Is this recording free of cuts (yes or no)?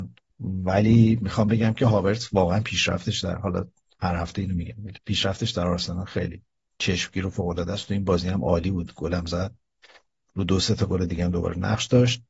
yes